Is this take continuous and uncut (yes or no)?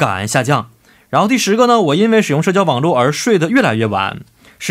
yes